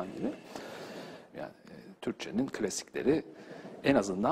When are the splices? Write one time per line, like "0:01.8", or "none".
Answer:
0:01.3